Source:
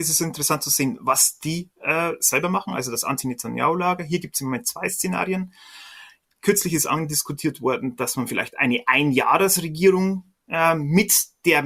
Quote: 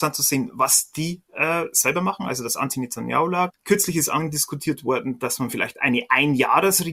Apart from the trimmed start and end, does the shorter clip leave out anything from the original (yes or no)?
yes